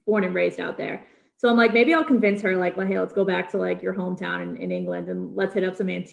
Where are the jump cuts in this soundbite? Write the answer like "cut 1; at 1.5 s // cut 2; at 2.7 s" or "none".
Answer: none